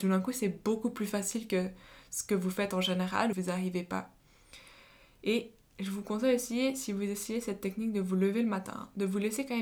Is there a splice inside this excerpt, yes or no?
yes